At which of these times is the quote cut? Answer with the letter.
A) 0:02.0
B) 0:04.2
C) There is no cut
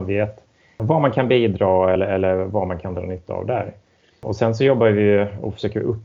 C